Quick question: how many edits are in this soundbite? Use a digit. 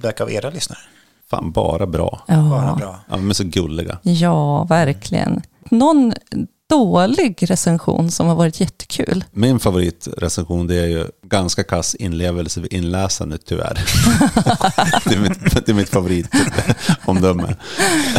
0